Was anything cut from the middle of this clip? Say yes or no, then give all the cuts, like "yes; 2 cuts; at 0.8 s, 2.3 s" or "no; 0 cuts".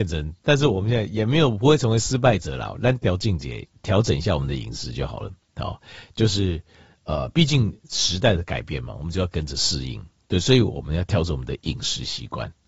no; 0 cuts